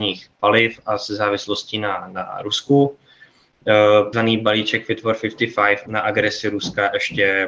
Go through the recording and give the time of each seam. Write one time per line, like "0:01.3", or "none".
0:04.1
0:05.9

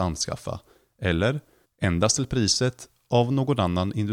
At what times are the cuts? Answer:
0:01.6

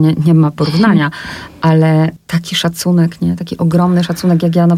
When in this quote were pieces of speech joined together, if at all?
none

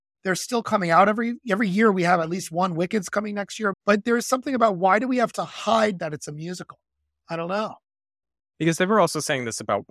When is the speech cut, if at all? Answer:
0:03.7

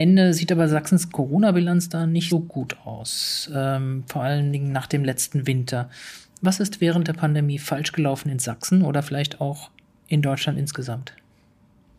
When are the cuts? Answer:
0:02.3

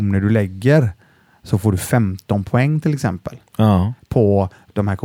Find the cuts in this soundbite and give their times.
none

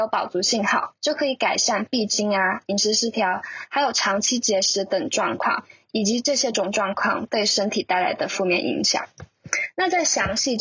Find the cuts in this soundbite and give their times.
0:06.5

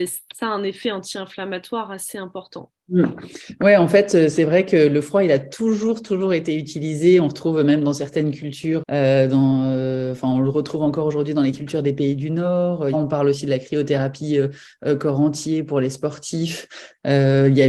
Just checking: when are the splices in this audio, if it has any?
0:08.8
0:12.9

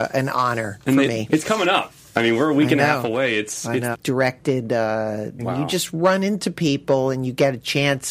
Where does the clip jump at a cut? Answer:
0:01.3
0:03.9
0:05.4

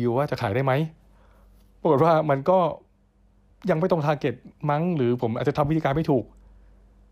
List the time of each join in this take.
none

